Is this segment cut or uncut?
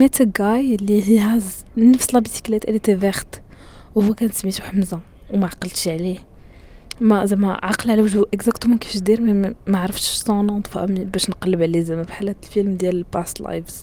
uncut